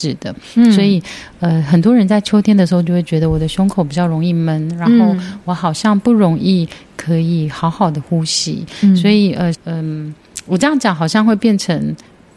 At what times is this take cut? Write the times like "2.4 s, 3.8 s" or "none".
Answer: 9.5 s